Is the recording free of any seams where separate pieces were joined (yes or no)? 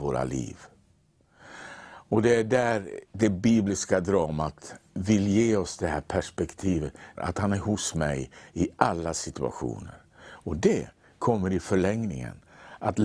no